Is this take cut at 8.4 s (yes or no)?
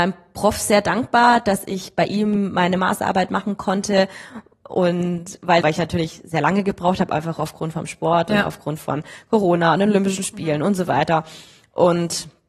no